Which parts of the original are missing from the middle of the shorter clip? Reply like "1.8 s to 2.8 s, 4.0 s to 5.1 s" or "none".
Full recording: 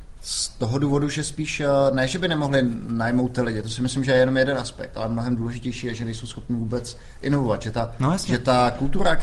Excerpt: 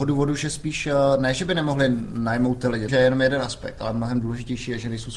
3.6 s to 4.0 s